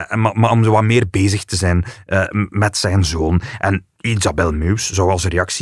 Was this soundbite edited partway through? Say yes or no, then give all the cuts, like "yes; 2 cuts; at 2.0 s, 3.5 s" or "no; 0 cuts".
no; 0 cuts